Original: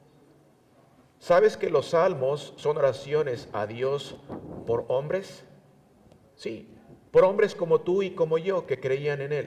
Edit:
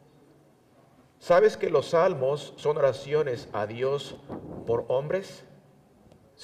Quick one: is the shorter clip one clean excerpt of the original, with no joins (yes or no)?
yes